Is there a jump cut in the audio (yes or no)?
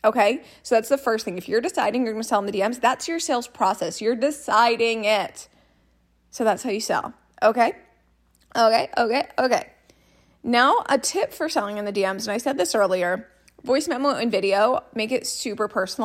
no